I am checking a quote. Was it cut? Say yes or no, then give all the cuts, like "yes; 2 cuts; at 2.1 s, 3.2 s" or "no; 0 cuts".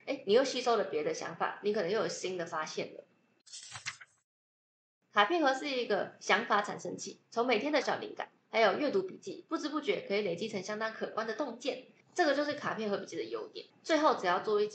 yes; 3 cuts; at 7.8 s, 12.0 s, 13.7 s